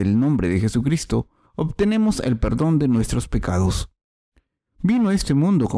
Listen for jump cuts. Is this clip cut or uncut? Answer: uncut